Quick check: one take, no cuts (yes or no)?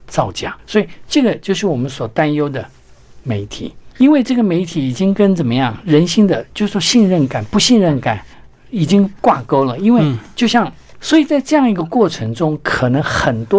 no